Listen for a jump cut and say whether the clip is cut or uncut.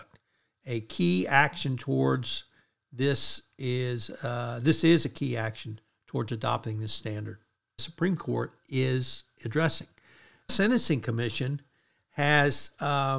cut